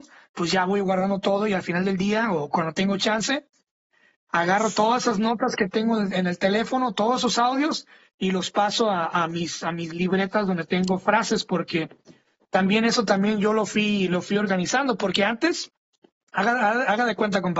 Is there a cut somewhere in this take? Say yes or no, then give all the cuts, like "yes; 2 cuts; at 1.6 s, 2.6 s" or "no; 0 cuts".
no; 0 cuts